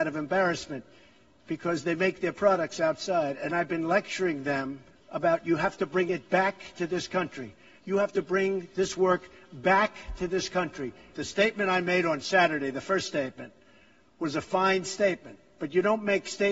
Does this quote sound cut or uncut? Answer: cut